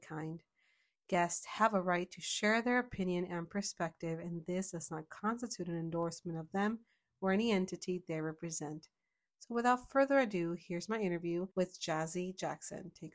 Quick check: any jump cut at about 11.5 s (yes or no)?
yes